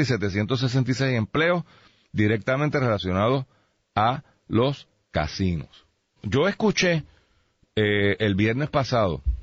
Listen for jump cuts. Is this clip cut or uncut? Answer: cut